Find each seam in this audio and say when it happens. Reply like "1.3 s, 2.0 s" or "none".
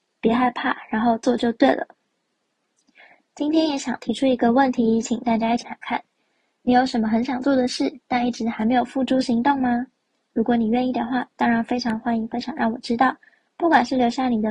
5.6 s

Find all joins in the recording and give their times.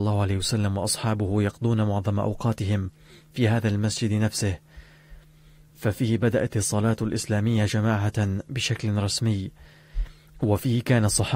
none

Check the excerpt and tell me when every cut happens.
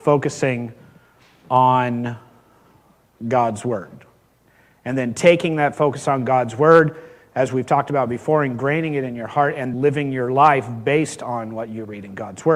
9.7 s

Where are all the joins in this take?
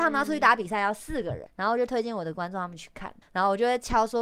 1.5 s, 3.2 s

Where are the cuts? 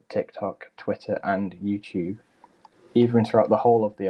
none

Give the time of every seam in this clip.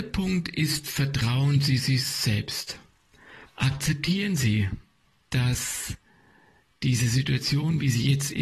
3.4 s

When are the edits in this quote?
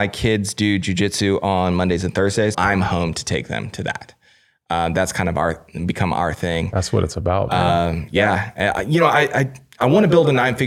2.5 s

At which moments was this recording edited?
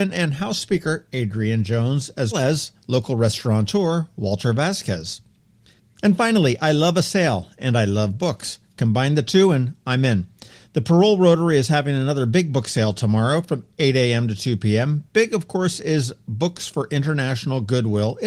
2.3 s

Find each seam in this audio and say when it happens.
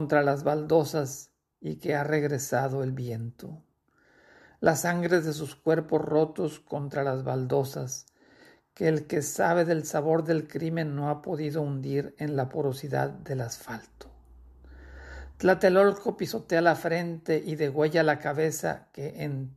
none

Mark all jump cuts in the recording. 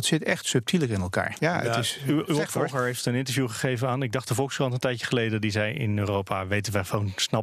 1.4 s

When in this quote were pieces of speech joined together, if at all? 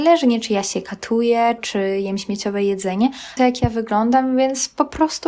1.6 s, 3.4 s

